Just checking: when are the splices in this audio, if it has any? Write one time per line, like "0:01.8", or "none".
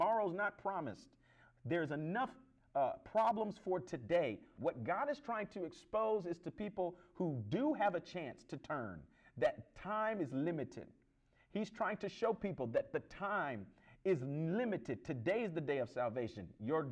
0:04.6